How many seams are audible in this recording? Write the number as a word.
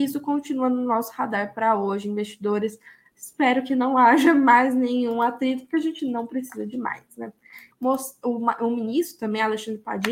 two